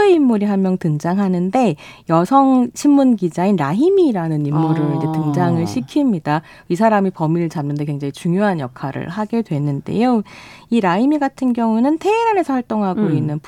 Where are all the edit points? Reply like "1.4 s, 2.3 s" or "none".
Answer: none